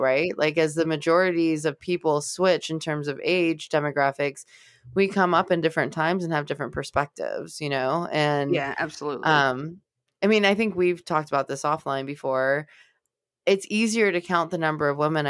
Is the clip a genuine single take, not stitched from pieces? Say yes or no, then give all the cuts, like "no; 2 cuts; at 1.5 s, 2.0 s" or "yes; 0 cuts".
yes; 0 cuts